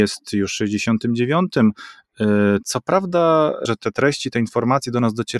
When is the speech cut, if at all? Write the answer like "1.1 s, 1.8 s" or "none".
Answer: 2.6 s, 3.7 s